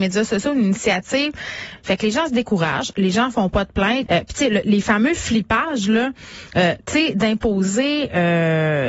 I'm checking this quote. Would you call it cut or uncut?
cut